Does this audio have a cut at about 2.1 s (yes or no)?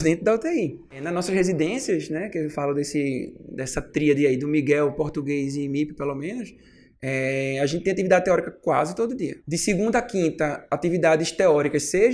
no